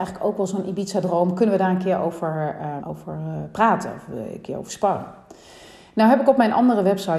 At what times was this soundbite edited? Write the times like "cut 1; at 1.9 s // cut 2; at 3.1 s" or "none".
cut 1; at 2.8 s